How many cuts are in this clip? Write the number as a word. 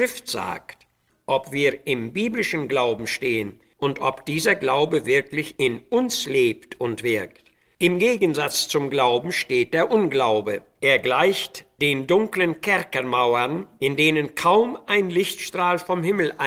one